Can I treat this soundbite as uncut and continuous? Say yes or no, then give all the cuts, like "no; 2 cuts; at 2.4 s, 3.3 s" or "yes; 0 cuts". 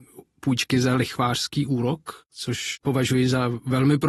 yes; 0 cuts